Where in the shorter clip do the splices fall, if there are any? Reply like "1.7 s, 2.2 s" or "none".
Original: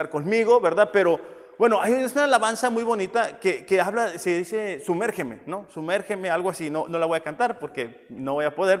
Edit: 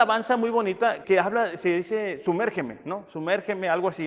1.0 s